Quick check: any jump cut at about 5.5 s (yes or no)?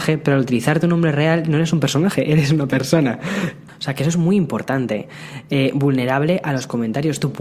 no